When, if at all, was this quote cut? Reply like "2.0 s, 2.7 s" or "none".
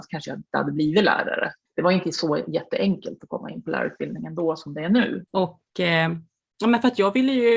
1.6 s, 5.3 s